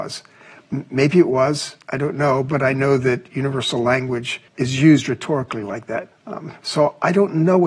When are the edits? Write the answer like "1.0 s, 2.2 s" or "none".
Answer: 4.5 s, 6.1 s